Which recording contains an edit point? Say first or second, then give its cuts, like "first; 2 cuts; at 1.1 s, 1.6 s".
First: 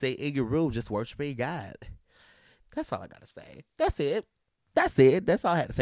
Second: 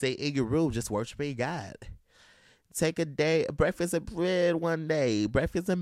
first; 1 cut; at 2.6 s